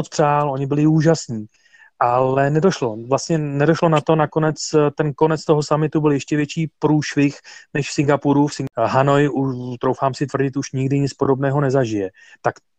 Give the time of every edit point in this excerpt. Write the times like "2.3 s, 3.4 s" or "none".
none